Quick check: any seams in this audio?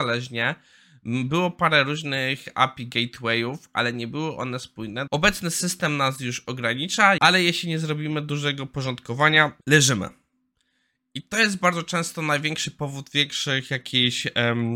yes; 3 cuts; at 5.1 s, 7.2 s, 9.6 s

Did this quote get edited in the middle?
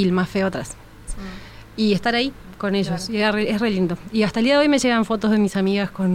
yes; 1 cut; at 1.1 s

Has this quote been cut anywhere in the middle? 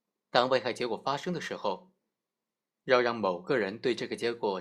no; 0 cuts

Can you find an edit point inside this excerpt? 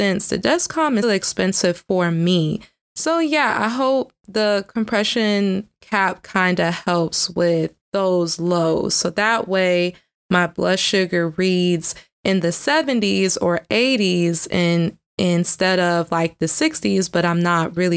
yes; 2 cuts; at 1.0 s, 7.8 s

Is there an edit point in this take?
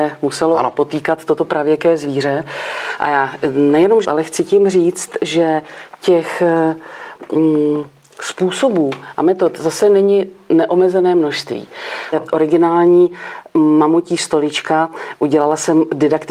yes; 2 cuts; at 4.0 s, 12.1 s

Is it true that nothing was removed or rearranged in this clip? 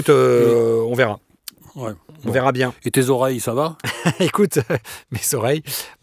yes; 0 cuts

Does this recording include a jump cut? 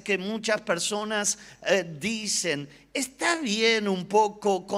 no; 0 cuts

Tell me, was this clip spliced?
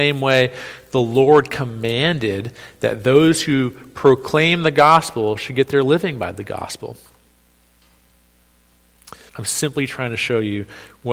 yes; 1 cut; at 9.3 s

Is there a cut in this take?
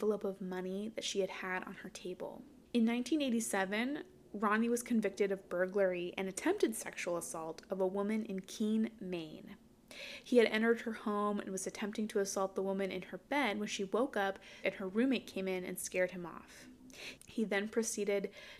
yes; 2 cuts; at 14.6 s, 17.2 s

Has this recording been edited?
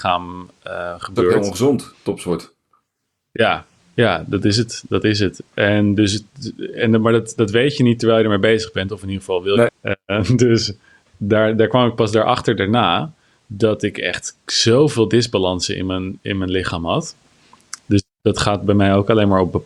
yes; 2 cuts; at 9.7 s, 17.8 s

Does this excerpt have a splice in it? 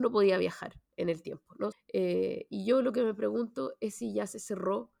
yes; 1 cut; at 1.7 s

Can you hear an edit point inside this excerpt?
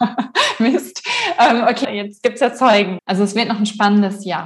yes; 2 cuts; at 1.8 s, 3.0 s

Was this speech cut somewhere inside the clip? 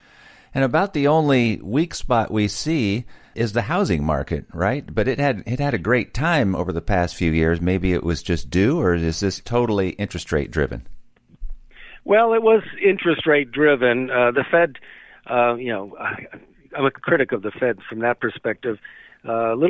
no; 0 cuts

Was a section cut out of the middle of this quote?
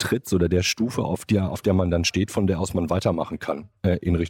no; 0 cuts

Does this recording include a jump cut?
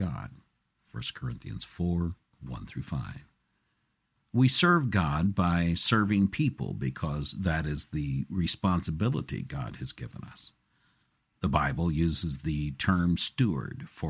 no; 0 cuts

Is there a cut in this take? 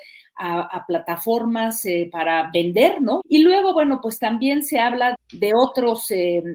yes; 2 cuts; at 3.2 s, 5.1 s

